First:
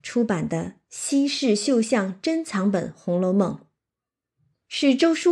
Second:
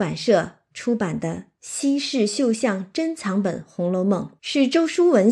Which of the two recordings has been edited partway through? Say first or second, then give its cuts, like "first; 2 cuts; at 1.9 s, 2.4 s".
second; 1 cut; at 4.4 s